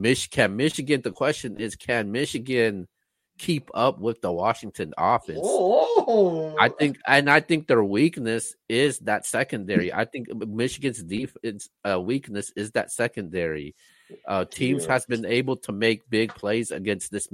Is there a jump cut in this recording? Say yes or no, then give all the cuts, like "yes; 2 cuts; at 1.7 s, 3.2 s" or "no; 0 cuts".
no; 0 cuts